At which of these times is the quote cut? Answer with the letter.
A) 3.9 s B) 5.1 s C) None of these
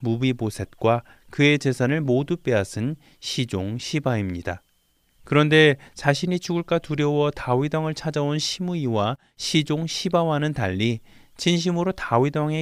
B